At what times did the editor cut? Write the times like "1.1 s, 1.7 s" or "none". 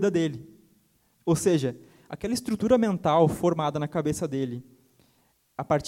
1.1 s

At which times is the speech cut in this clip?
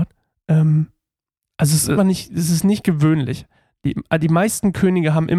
2.0 s

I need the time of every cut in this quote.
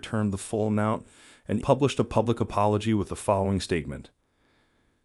1.6 s

